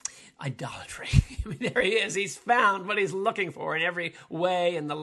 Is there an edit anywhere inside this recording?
no; 0 cuts

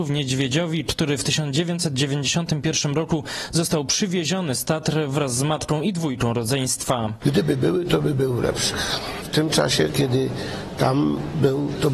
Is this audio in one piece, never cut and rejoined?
yes; 0 cuts

